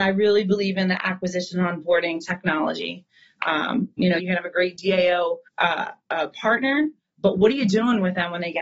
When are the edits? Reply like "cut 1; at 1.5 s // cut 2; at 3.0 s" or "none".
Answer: cut 1; at 4.2 s // cut 2; at 5.5 s